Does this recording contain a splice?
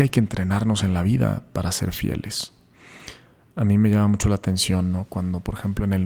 no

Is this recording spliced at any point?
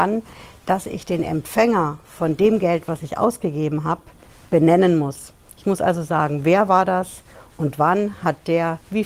no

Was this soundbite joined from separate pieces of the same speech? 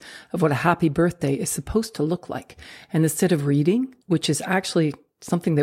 yes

